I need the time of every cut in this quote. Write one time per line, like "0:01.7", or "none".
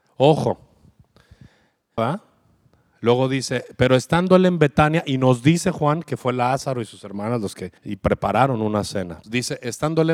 0:02.0
0:07.8
0:09.2